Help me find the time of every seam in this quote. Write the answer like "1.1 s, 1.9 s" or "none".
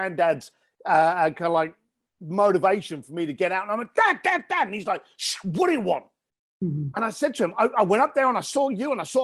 none